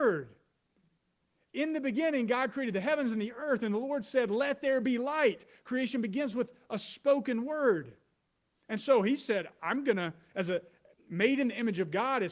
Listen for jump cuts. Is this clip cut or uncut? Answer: uncut